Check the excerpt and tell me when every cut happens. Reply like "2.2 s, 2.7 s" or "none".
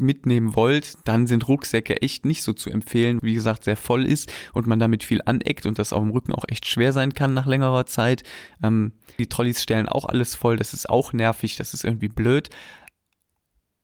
3.2 s, 9.2 s